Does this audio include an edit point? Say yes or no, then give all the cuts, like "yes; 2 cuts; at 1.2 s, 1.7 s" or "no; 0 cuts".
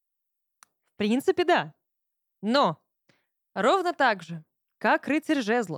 no; 0 cuts